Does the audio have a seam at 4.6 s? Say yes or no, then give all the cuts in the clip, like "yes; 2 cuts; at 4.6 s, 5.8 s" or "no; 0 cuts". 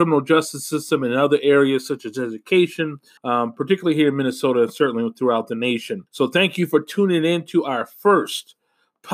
no; 2 cuts; at 3.2 s, 6.1 s